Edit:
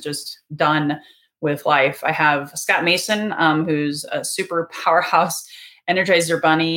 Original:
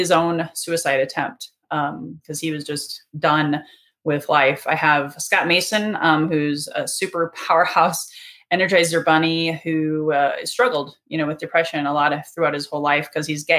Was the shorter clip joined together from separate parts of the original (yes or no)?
no